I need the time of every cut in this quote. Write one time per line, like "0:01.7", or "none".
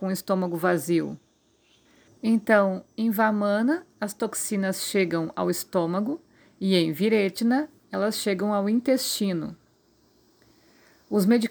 0:02.1